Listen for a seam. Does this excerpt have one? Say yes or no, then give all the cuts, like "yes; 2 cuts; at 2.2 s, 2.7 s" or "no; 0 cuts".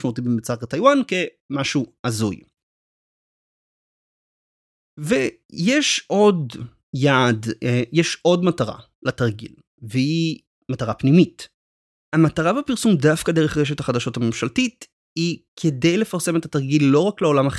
yes; 1 cut; at 12.0 s